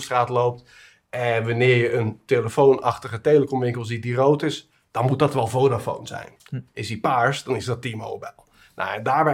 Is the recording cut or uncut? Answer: uncut